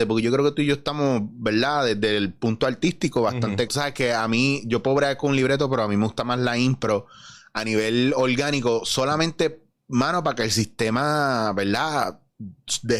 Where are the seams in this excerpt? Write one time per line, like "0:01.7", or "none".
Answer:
0:03.7